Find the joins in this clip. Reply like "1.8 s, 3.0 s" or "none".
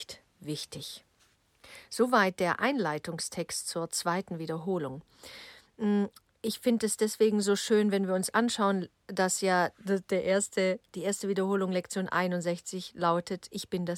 none